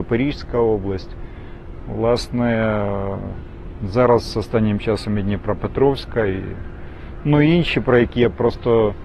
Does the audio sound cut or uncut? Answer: uncut